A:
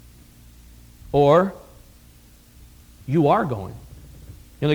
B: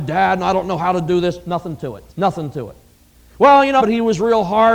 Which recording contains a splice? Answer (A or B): B